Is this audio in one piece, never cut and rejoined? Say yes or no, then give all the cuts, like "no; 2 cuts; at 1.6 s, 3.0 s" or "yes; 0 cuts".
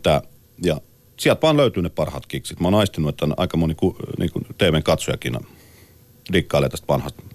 no; 1 cut; at 2.6 s